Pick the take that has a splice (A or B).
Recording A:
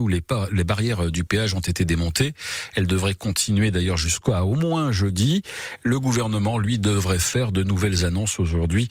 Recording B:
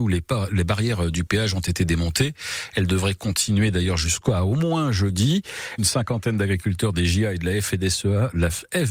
B